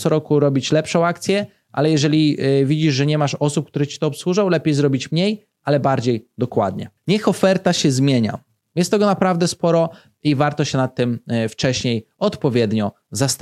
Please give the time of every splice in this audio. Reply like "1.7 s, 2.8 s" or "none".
7.0 s, 8.7 s